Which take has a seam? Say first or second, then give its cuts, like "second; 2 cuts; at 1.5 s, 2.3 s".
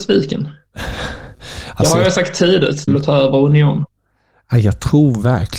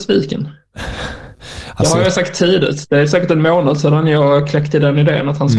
first; 1 cut; at 2.9 s